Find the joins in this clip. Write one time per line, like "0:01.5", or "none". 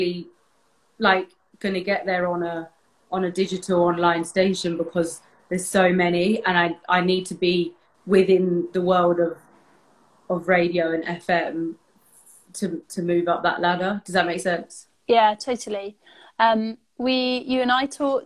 none